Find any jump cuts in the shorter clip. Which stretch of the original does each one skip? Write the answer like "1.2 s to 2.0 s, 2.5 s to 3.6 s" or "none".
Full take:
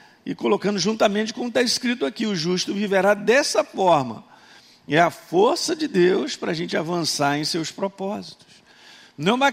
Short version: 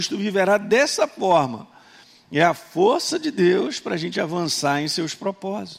none